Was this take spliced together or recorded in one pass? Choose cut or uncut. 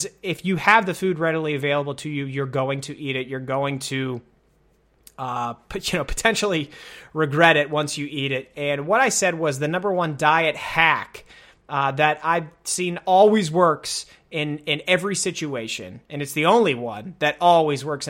cut